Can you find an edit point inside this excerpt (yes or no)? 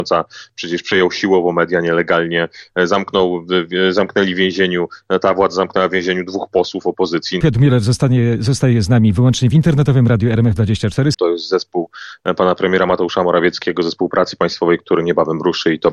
yes